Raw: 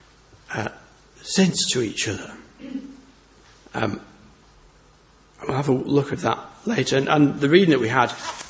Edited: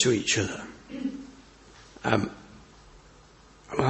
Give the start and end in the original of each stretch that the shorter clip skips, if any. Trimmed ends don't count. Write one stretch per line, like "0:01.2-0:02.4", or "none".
none